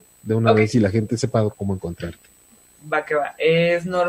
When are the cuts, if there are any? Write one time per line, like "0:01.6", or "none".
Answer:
0:01.5